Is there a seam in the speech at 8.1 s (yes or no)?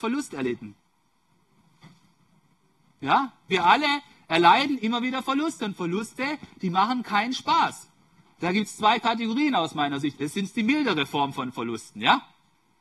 no